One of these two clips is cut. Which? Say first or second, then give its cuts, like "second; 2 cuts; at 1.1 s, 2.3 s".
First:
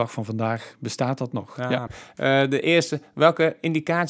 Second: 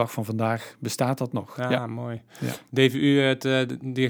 first; 1 cut; at 1.9 s